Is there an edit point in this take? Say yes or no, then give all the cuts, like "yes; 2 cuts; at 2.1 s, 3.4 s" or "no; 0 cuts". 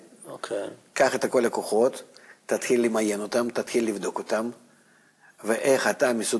no; 0 cuts